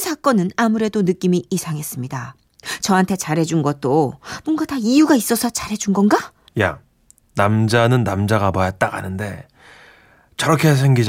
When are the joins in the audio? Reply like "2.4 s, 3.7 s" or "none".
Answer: 6.5 s